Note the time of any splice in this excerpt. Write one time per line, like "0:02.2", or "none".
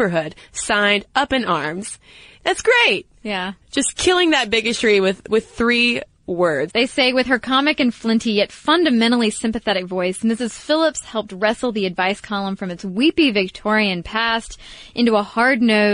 0:02.4
0:06.7